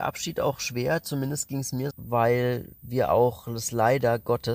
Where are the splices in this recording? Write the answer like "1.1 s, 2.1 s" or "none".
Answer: 1.9 s